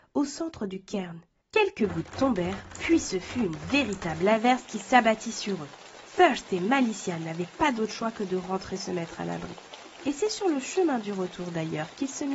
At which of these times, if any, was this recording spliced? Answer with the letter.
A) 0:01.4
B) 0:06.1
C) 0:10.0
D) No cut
A